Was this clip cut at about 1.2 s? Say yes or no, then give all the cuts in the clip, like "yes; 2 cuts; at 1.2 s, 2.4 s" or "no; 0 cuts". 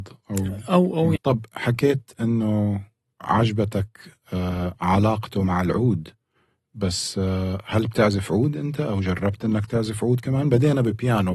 yes; 1 cut; at 1.2 s